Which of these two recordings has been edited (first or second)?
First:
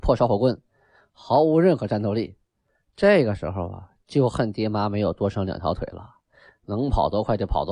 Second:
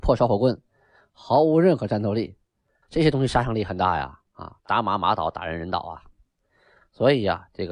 second